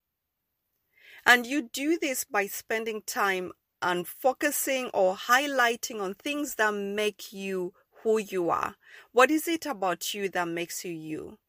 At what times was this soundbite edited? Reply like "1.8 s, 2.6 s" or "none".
none